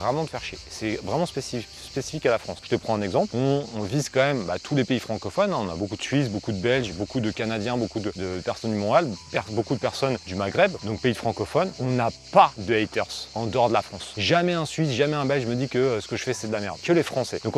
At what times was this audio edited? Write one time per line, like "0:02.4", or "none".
none